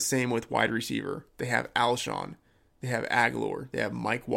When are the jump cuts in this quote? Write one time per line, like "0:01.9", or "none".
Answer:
none